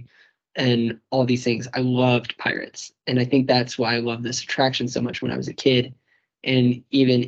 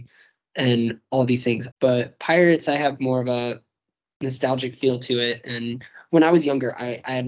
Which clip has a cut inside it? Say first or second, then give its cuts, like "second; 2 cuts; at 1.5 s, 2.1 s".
second; 1 cut; at 1.7 s